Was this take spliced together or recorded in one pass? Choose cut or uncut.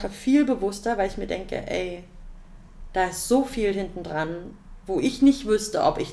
uncut